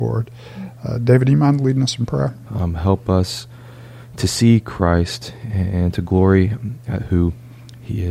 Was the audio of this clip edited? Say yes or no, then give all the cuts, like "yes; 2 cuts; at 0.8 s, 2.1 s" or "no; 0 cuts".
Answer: yes; 1 cut; at 2.5 s